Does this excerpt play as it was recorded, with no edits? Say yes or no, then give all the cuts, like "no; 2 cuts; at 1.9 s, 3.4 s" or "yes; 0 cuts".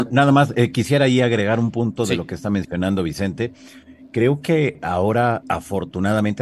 no; 1 cut; at 5.4 s